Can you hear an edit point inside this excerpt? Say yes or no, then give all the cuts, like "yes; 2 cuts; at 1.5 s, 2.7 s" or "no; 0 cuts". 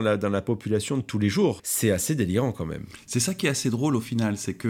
yes; 1 cut; at 1.6 s